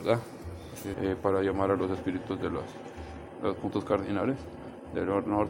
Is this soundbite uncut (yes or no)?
no